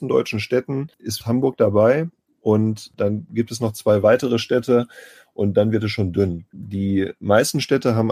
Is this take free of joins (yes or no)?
no